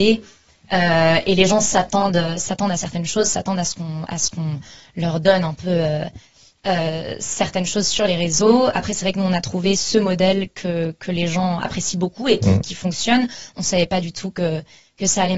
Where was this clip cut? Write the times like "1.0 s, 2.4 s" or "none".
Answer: none

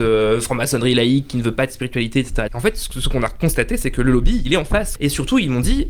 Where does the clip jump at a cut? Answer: 2.5 s, 5.0 s

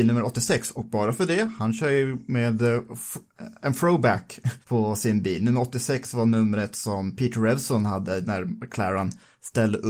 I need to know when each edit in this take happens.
4.6 s

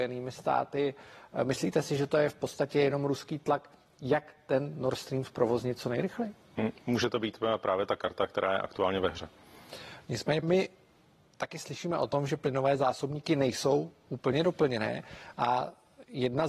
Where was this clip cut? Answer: 10.4 s

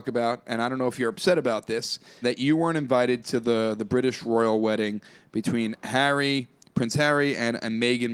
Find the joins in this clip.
2.2 s

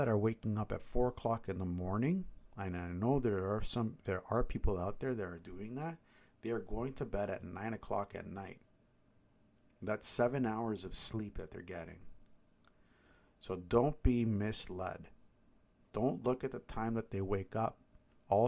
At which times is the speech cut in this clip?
none

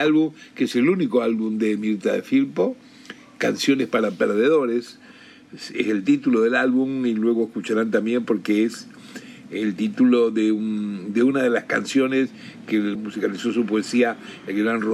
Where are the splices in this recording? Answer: 13.0 s

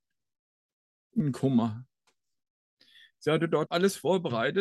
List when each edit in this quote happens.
3.7 s

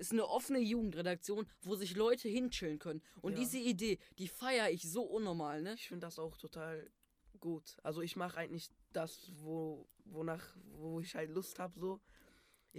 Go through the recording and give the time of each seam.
7.8 s

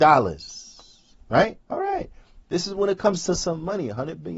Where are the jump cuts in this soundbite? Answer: 1.6 s

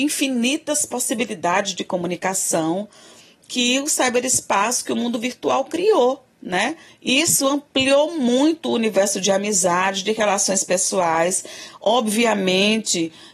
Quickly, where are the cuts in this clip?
6.9 s

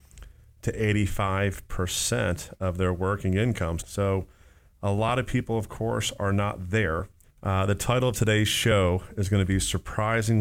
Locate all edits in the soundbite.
3.8 s, 7.2 s

